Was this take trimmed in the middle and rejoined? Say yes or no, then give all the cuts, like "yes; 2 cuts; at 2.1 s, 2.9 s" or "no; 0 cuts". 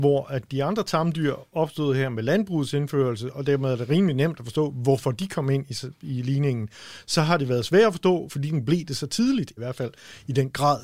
yes; 2 cuts; at 8.3 s, 9.6 s